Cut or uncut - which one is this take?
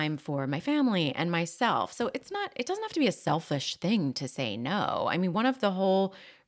uncut